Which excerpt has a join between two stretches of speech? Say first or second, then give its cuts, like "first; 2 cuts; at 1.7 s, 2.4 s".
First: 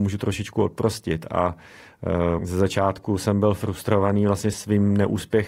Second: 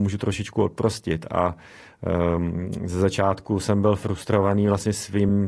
first; 2 cuts; at 2.4 s, 4.5 s